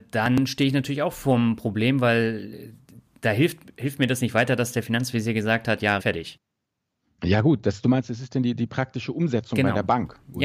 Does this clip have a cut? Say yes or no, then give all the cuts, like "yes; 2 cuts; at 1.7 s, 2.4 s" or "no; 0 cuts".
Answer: yes; 1 cut; at 6.0 s